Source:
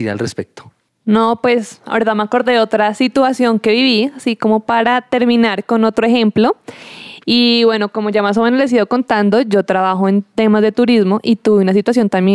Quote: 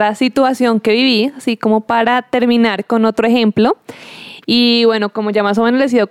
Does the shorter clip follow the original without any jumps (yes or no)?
yes